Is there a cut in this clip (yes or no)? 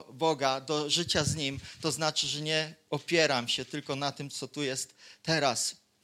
no